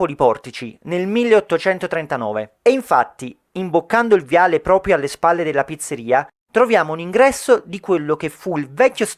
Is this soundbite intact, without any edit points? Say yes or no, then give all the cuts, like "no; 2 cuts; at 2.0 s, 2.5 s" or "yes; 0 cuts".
yes; 0 cuts